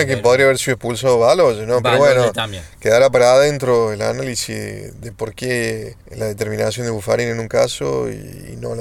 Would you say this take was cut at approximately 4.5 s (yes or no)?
no